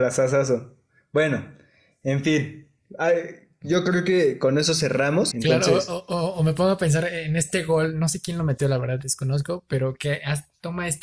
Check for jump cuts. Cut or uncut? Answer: cut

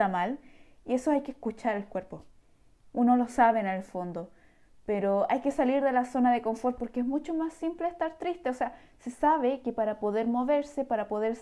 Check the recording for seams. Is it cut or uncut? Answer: uncut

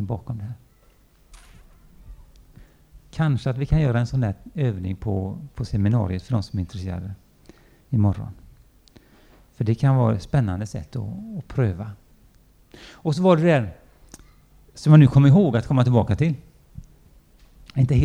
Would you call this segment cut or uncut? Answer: uncut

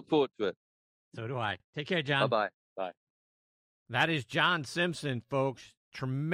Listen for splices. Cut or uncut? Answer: uncut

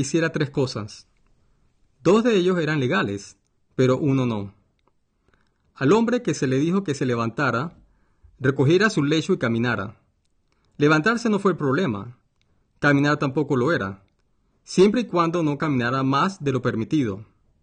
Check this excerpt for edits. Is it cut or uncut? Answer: uncut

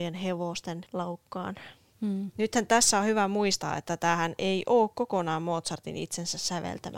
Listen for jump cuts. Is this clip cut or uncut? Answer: cut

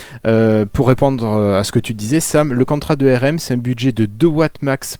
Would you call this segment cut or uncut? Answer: uncut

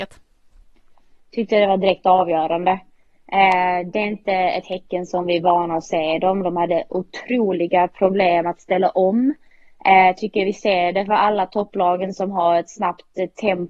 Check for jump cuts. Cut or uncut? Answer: uncut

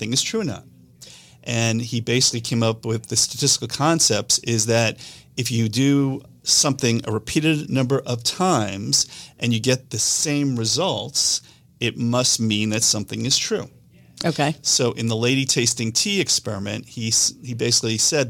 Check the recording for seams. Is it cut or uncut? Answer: uncut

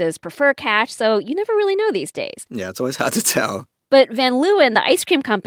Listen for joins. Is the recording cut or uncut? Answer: uncut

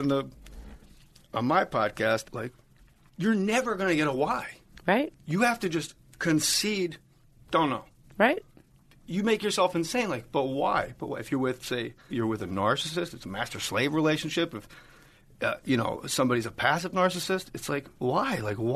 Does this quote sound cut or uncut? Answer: cut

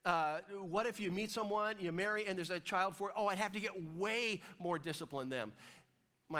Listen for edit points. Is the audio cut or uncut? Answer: uncut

